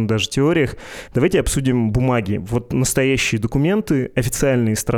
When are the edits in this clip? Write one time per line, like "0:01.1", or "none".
none